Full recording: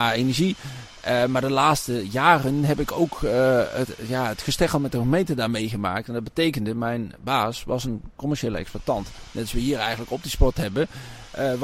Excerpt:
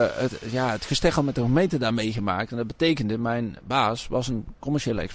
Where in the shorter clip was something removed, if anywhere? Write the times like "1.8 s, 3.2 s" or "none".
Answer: none